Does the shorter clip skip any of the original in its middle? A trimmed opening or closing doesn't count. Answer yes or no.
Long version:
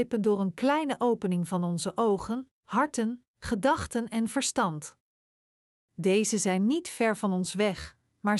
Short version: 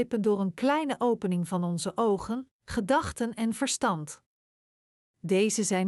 yes